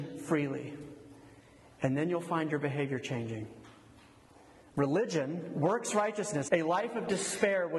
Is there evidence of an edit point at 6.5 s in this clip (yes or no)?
yes